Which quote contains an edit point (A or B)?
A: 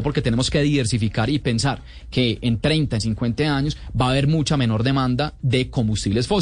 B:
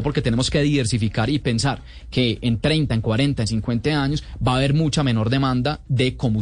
A